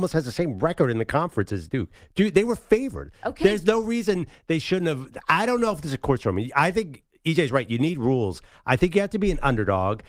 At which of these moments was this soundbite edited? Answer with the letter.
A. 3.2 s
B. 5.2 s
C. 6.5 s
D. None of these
D